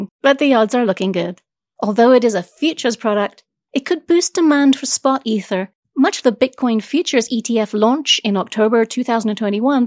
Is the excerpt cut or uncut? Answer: cut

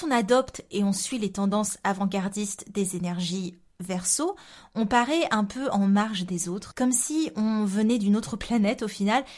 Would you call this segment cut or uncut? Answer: cut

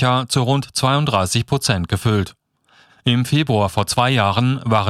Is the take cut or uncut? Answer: cut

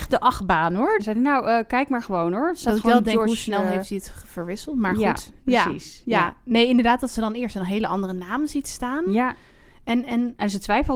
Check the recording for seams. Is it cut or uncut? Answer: cut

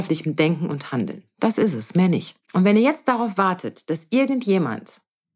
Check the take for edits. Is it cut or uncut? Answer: cut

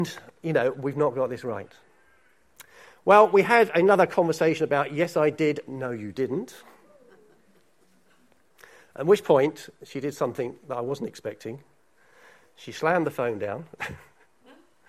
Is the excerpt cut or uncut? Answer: uncut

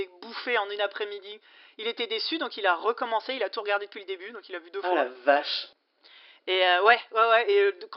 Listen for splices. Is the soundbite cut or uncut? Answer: uncut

